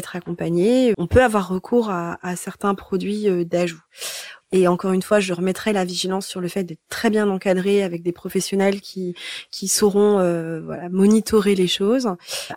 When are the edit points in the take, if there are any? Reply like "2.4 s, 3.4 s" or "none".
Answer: 0.9 s, 4.4 s